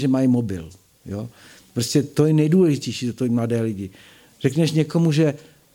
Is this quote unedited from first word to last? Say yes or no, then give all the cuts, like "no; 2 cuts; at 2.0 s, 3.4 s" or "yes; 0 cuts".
yes; 0 cuts